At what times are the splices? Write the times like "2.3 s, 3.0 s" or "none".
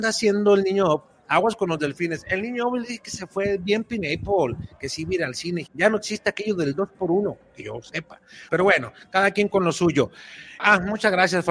5.7 s, 8.5 s, 10.6 s